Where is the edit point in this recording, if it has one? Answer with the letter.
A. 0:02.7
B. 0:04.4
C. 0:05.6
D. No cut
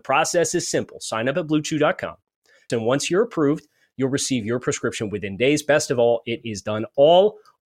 A